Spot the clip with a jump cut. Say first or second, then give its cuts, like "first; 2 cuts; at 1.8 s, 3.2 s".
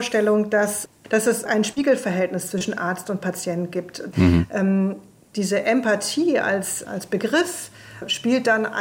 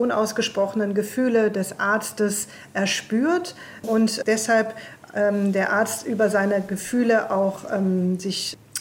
first; 2 cuts; at 4.1 s, 6.8 s